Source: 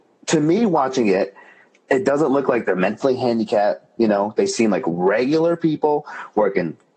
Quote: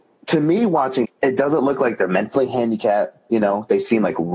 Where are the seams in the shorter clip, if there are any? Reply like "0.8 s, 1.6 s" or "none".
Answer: 1.0 s

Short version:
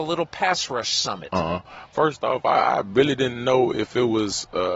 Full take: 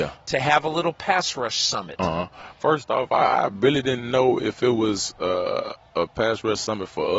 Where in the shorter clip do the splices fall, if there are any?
none

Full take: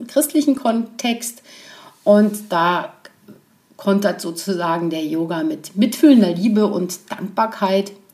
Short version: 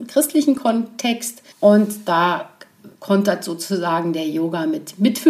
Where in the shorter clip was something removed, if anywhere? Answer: 1.5 s, 2.9 s

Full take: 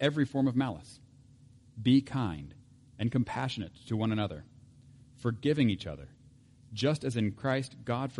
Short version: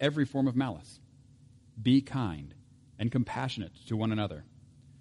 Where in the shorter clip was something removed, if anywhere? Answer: none

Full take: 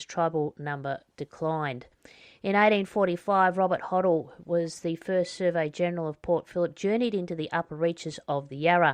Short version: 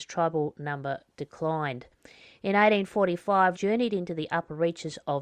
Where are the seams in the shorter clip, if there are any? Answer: 3.5 s

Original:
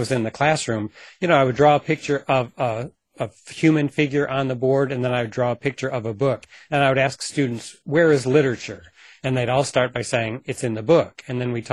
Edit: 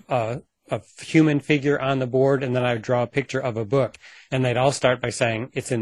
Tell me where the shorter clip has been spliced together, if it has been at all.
4.1 s

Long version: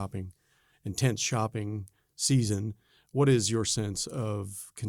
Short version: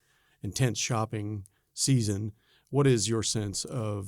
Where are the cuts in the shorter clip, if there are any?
none

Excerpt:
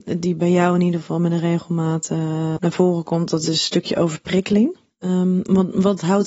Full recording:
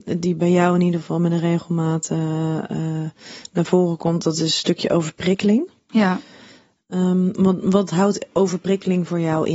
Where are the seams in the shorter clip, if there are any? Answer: 2.6 s, 4.9 s

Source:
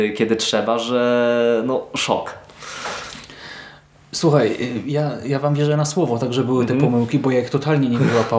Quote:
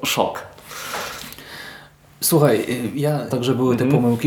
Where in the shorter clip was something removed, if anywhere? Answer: 3.3 s

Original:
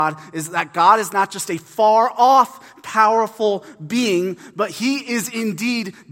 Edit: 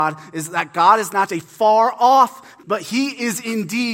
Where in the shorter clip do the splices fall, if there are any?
1.3 s, 2.6 s

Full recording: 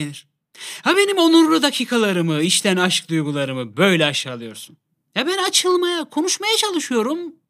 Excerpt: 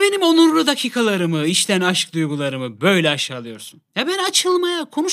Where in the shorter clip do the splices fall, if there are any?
3.9 s

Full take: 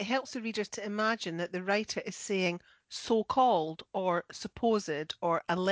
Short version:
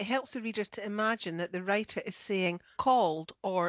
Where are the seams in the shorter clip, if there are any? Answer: 2.7 s

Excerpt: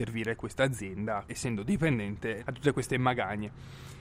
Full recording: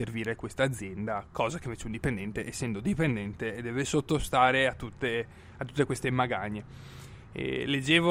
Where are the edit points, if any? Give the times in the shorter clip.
1.3 s, 2.4 s

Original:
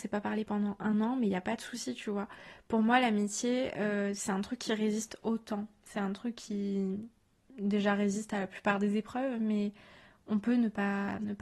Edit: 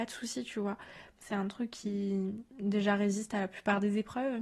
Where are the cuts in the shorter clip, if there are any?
1.1 s, 2.5 s

